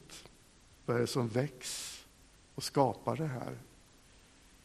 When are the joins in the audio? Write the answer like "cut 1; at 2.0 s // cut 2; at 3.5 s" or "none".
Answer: none